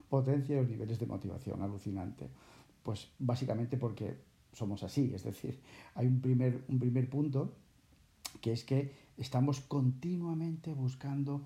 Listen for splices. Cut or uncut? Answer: uncut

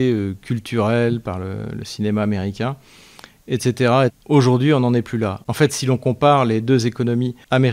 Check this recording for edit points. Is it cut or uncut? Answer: cut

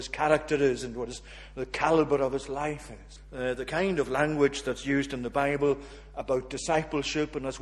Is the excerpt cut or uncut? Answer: cut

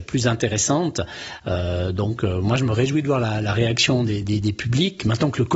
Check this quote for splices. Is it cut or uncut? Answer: uncut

